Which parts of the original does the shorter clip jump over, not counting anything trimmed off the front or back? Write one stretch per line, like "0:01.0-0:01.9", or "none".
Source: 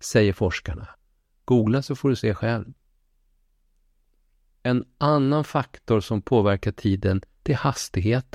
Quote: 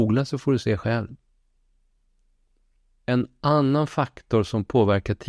none